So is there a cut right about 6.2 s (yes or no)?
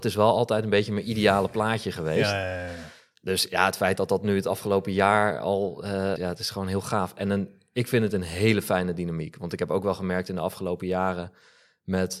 yes